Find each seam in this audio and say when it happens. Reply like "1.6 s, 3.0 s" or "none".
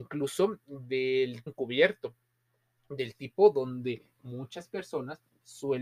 1.5 s